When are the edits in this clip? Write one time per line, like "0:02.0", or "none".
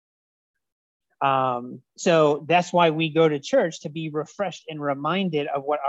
0:01.9